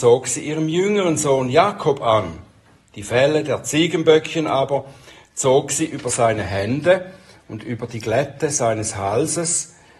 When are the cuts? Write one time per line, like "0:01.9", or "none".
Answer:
none